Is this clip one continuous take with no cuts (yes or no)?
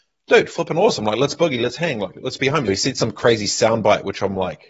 no